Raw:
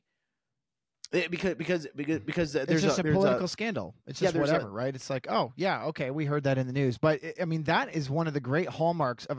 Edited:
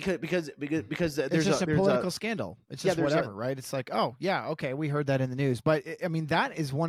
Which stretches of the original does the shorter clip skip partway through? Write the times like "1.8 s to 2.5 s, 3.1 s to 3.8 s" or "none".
none